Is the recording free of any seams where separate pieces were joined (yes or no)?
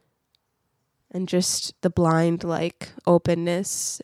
no